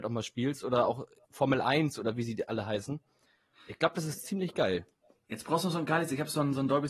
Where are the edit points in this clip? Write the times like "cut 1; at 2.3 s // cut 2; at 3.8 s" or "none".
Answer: cut 1; at 1.2 s